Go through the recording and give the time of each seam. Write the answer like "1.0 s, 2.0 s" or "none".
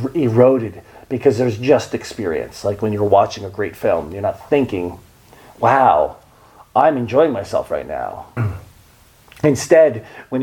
8.4 s